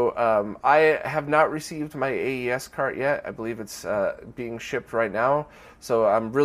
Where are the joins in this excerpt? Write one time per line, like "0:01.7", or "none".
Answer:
none